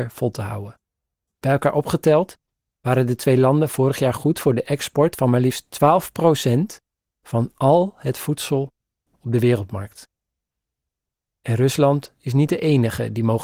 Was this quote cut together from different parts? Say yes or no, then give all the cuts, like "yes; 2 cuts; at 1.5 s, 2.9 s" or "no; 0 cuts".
yes; 1 cut; at 1.2 s